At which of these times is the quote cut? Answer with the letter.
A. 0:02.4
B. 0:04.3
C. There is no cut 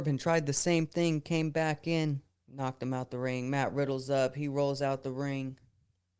A